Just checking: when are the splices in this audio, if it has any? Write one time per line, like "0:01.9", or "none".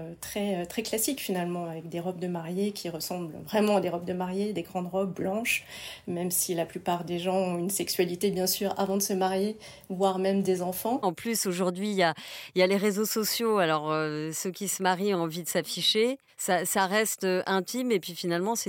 0:11.0